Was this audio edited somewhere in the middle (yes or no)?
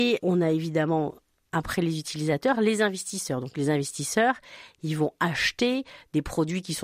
no